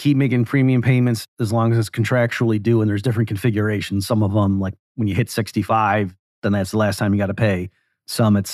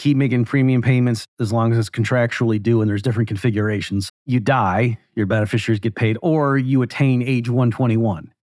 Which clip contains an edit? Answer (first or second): second